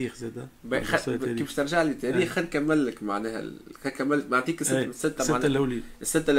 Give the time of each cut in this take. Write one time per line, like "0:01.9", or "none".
0:04.8